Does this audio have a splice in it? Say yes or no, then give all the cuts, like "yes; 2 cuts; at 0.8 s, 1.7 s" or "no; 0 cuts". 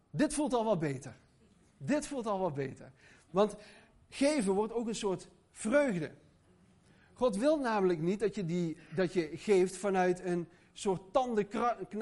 no; 0 cuts